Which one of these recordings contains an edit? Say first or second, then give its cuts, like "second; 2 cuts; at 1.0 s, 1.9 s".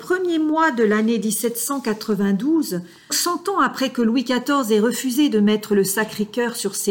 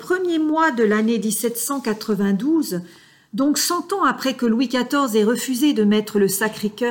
first; 1 cut; at 3.1 s